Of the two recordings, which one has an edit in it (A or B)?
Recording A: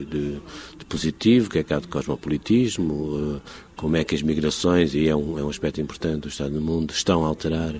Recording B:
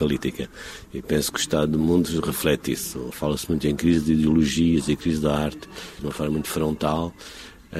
B